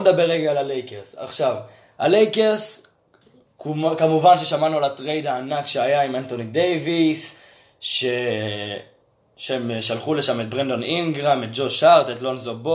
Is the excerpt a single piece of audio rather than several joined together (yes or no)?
yes